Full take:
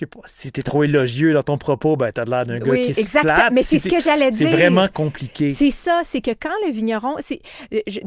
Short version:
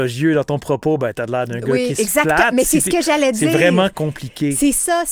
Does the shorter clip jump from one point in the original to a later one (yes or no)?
no